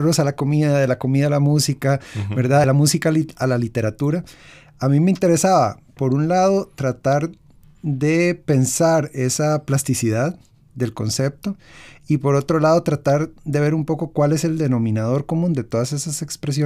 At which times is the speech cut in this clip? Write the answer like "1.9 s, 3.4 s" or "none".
none